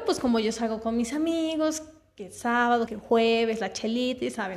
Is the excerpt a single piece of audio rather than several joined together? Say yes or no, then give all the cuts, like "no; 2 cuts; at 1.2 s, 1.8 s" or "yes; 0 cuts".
no; 1 cut; at 2.9 s